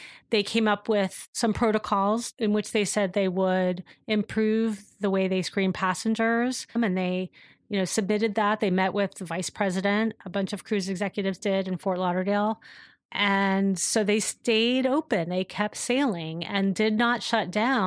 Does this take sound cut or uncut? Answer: cut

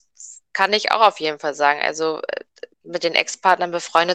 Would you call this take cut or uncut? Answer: cut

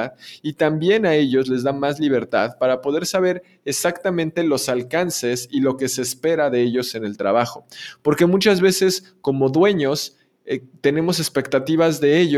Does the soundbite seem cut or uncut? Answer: uncut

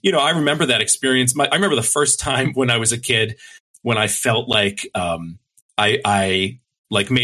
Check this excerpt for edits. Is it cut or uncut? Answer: uncut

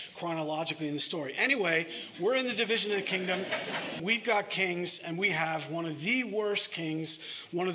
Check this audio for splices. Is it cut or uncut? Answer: cut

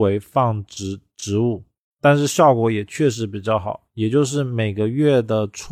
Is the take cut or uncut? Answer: cut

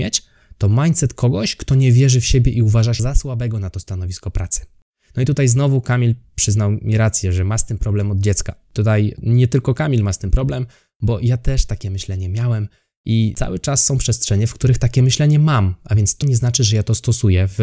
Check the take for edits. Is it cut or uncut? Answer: cut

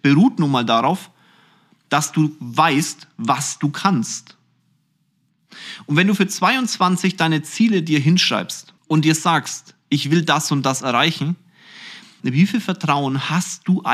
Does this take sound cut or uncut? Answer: cut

